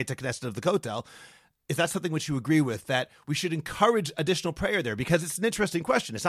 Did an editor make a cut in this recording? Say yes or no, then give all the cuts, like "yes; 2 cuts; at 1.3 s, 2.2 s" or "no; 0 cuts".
no; 0 cuts